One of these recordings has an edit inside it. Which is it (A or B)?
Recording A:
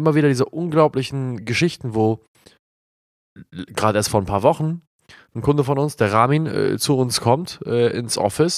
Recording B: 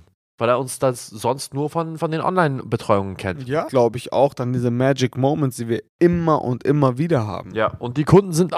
B